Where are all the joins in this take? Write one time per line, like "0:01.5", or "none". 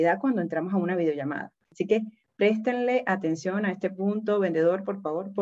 none